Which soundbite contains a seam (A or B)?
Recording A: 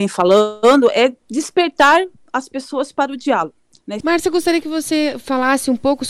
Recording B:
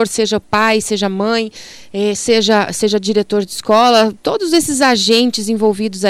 A